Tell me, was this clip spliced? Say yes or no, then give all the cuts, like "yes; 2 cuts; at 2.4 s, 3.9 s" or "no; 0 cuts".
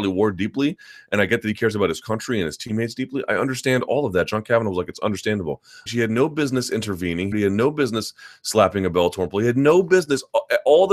yes; 2 cuts; at 5.9 s, 7.3 s